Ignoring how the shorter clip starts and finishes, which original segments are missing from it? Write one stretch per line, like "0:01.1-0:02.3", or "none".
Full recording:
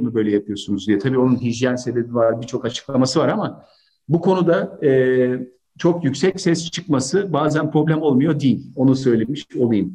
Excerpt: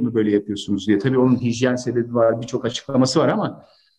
none